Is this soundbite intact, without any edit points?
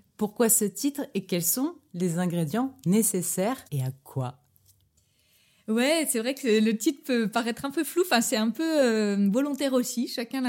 no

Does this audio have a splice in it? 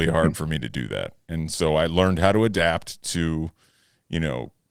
no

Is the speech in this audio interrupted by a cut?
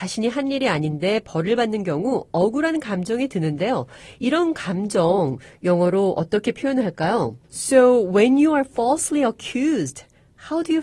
yes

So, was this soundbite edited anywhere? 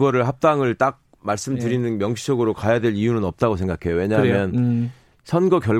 no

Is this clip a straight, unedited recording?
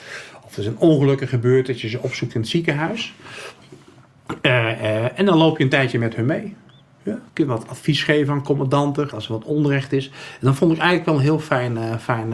no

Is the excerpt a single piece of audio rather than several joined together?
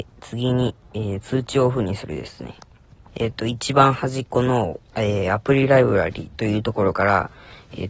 no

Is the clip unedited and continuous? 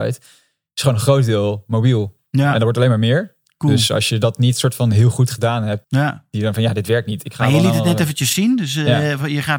no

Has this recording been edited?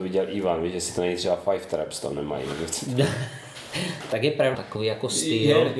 yes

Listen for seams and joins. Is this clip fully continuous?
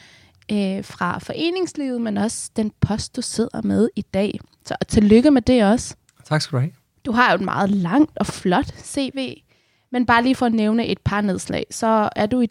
yes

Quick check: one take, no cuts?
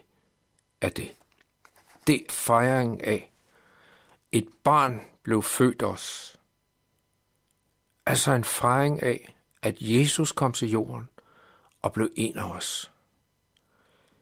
no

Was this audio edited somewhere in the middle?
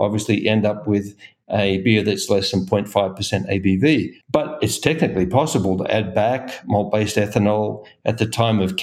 yes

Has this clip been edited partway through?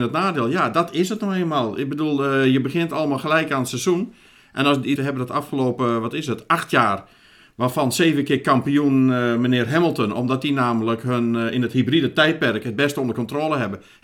yes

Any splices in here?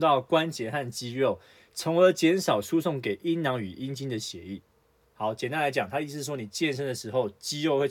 no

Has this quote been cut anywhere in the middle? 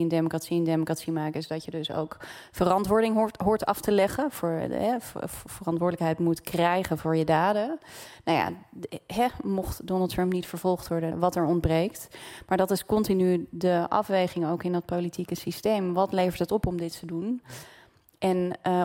yes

